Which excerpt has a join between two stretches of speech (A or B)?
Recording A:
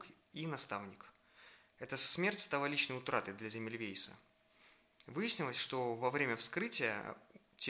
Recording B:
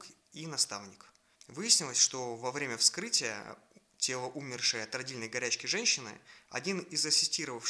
B